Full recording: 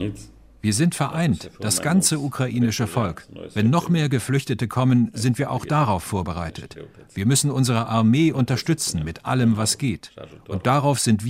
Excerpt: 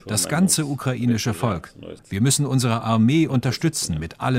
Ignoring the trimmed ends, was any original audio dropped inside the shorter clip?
yes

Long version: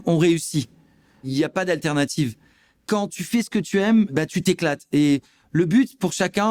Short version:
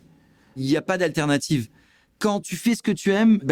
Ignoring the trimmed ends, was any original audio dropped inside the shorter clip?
no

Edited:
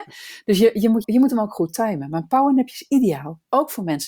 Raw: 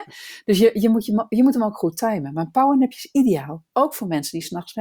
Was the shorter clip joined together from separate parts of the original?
yes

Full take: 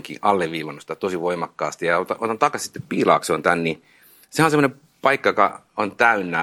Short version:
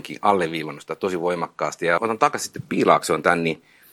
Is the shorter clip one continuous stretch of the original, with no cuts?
no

